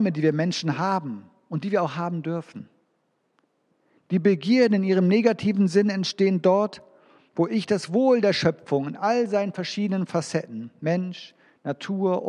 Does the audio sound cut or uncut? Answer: uncut